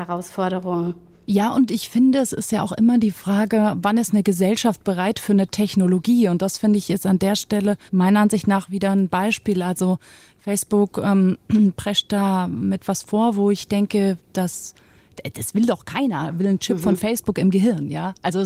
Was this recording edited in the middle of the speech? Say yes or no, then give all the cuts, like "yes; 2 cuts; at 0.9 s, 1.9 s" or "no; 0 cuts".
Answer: yes; 1 cut; at 7.9 s